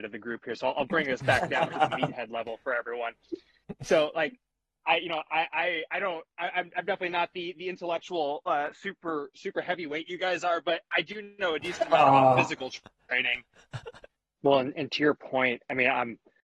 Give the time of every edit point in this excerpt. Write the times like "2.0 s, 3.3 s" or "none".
14.4 s